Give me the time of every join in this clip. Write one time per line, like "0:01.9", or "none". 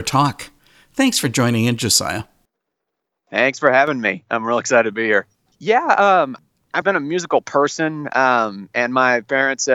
0:05.5
0:06.8